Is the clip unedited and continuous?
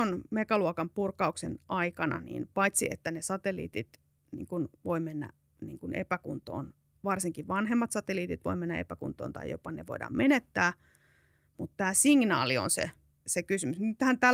no; 1 cut; at 13.2 s

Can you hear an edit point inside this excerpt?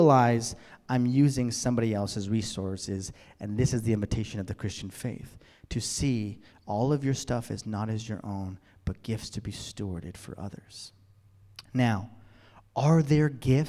no; 0 cuts

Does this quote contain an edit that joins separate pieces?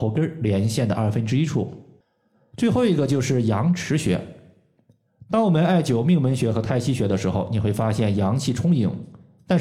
no; 0 cuts

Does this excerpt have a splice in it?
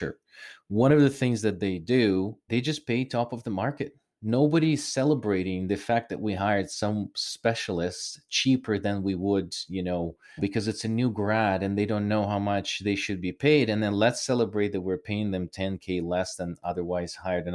yes; 1 cut; at 10.4 s

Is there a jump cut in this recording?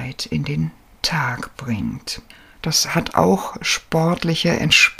yes; 1 cut; at 2.6 s

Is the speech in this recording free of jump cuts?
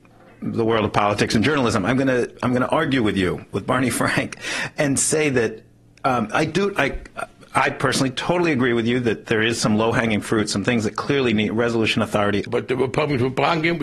no; 1 cut; at 12.5 s

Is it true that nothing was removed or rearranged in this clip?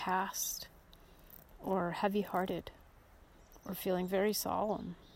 yes; 0 cuts

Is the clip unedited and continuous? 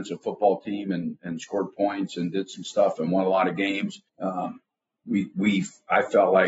no; 1 cut; at 4.1 s

